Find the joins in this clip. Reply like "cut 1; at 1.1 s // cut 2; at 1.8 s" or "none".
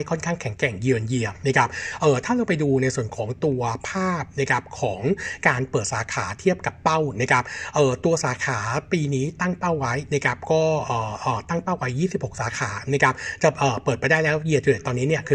none